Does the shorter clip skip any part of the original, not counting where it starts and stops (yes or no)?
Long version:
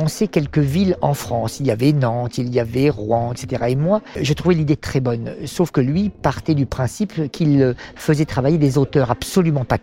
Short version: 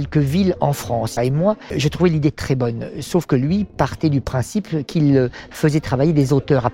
yes